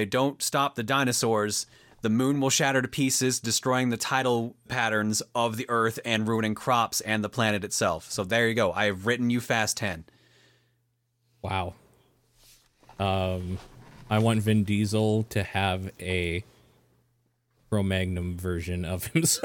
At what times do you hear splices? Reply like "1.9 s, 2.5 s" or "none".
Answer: 4.7 s